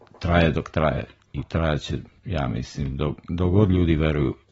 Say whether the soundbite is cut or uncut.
uncut